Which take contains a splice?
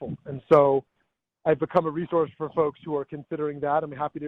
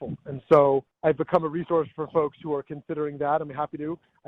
second; 1 cut; at 0.9 s

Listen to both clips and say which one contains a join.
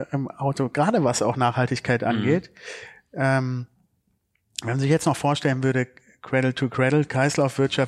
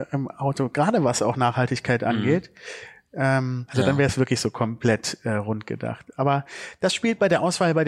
second; 1 cut; at 3.7 s

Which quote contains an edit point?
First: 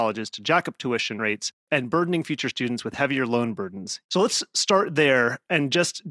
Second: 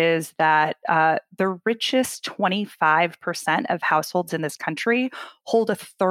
first; 1 cut; at 4.0 s

